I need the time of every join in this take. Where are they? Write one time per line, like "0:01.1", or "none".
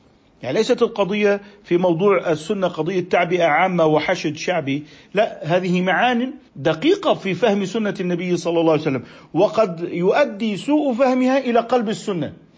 0:06.5

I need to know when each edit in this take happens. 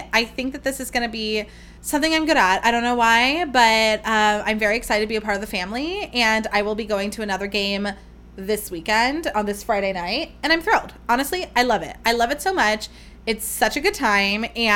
0:01.8

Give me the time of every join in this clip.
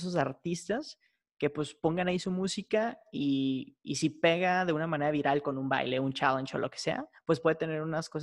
none

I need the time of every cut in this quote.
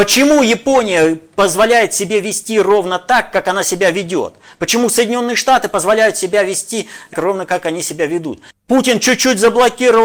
0:07.1
0:08.5

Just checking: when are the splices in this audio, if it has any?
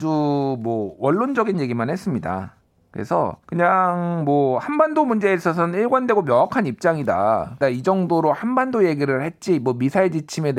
0:03.4
0:07.6

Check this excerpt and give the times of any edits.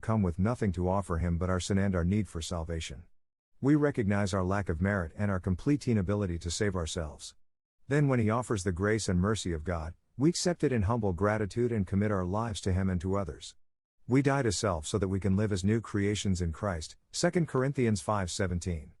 none

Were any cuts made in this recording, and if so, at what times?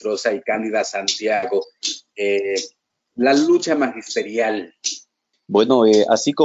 0:05.3

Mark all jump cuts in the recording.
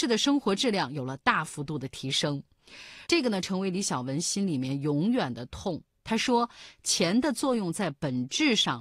0:03.1
0:05.9

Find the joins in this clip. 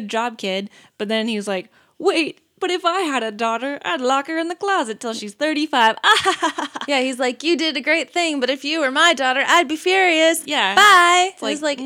none

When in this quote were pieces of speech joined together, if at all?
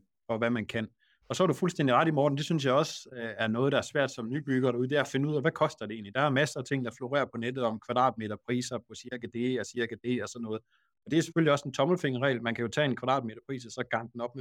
none

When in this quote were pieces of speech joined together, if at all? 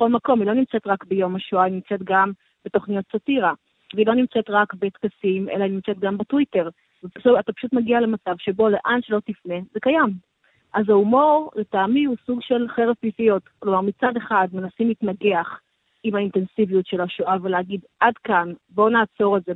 none

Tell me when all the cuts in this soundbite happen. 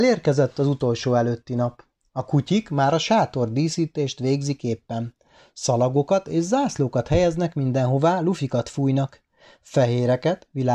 none

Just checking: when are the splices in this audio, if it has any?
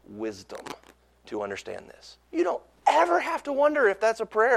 0:02.2

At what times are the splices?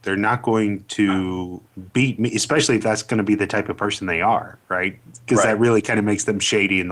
none

